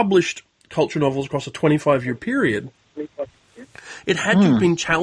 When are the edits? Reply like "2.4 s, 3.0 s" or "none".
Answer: none

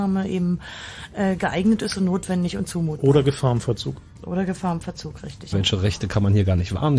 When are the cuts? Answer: 5.5 s

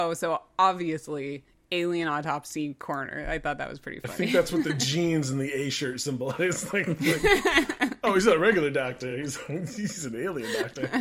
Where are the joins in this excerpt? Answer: none

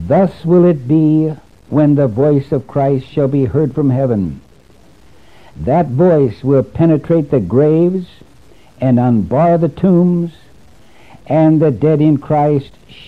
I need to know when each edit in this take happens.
none

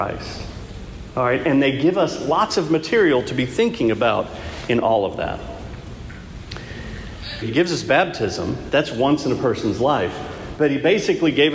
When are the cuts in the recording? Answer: 7.4 s, 10.6 s

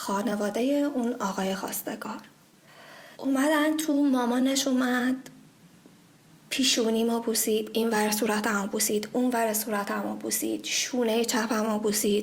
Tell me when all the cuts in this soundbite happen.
3.1 s

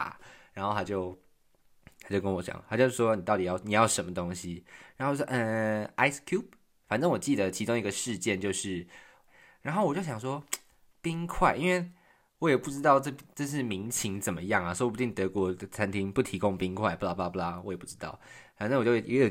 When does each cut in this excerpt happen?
6.8 s, 9.3 s

